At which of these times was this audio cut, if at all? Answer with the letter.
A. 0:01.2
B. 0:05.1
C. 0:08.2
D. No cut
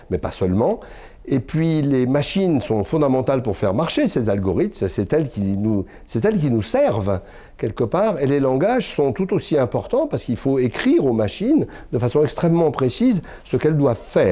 D